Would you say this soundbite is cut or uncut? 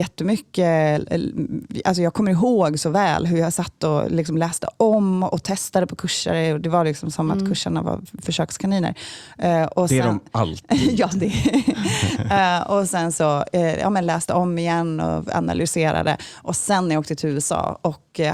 uncut